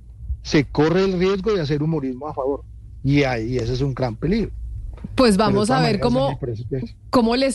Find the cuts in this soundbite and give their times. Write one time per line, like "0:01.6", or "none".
0:03.0